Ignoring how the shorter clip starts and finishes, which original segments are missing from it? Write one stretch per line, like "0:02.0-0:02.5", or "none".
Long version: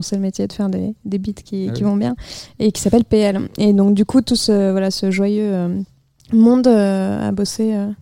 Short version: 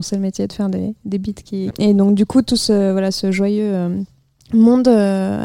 0:01.7-0:03.5